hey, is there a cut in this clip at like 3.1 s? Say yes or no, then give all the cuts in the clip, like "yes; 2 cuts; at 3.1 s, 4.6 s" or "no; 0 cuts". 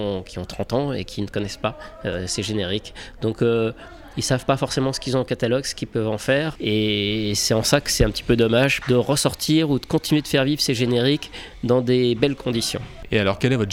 no; 2 cuts; at 6.6 s, 8.8 s